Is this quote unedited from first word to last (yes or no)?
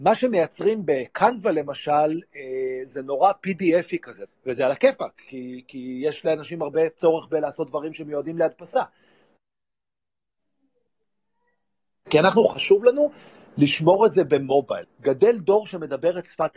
no